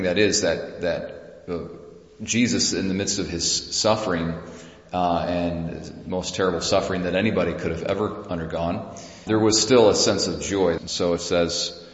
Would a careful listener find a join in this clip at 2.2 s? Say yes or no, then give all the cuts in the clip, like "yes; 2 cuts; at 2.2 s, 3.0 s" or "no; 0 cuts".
no; 2 cuts; at 9.3 s, 10.8 s